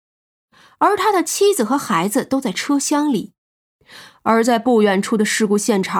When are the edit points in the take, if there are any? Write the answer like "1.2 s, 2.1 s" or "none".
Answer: 3.6 s